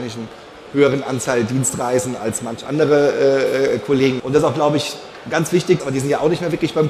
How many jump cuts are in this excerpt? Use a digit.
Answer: 2